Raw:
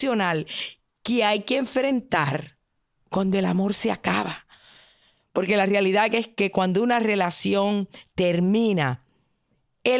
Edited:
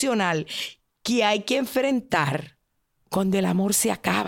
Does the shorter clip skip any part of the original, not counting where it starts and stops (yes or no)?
no